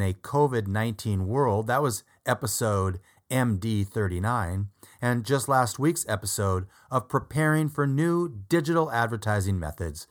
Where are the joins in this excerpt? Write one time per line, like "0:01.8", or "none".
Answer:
none